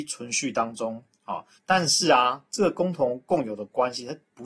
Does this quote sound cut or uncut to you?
cut